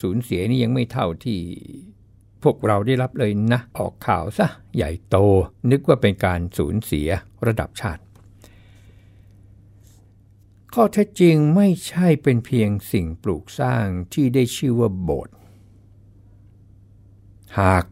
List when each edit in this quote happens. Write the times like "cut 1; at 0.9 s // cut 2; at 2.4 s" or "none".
cut 1; at 3.7 s

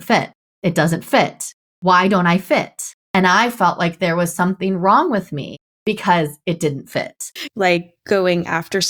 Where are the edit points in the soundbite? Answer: cut 1; at 7.4 s

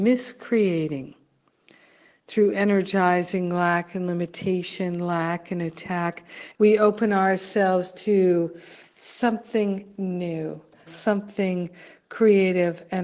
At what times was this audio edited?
cut 1; at 6.5 s // cut 2; at 10.9 s

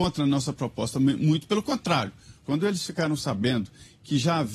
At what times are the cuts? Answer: cut 1; at 2.4 s

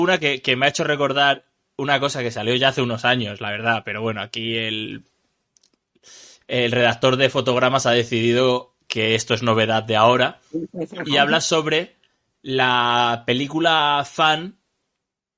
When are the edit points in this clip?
none

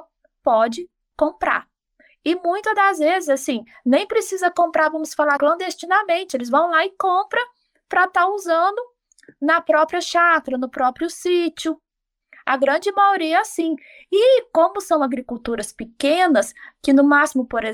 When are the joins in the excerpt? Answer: cut 1; at 5.4 s

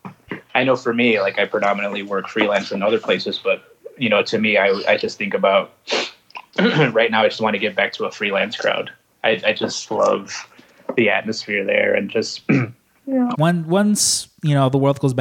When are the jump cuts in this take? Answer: cut 1; at 13.3 s

